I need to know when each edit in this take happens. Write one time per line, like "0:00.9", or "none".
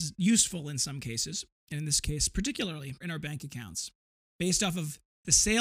0:03.0